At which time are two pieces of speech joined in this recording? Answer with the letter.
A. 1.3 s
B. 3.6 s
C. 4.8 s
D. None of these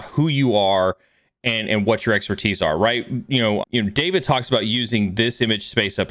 B